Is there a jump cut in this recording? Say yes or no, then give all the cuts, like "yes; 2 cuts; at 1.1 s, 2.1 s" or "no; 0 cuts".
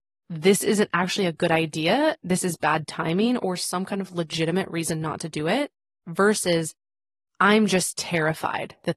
yes; 2 cuts; at 3.4 s, 6.0 s